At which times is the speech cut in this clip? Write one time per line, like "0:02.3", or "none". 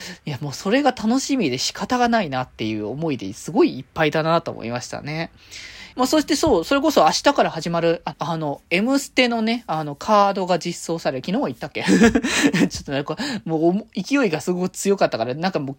0:05.9
0:08.1